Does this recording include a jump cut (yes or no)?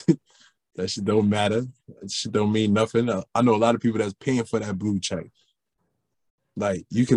no